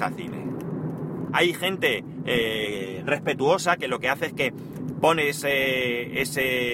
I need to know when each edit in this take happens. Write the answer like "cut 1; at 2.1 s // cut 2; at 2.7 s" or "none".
cut 1; at 1.3 s